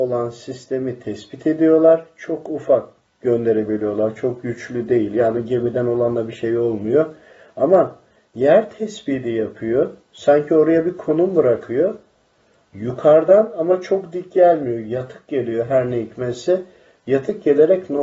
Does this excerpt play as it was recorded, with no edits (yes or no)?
yes